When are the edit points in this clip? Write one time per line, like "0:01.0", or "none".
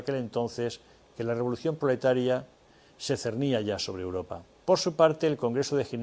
0:04.6